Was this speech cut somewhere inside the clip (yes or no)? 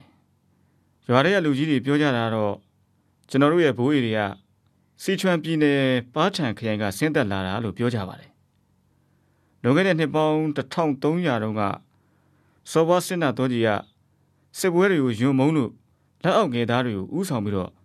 no